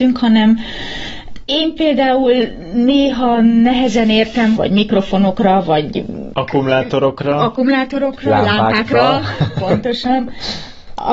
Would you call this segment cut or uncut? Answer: cut